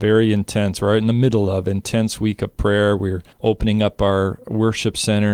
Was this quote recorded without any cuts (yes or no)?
no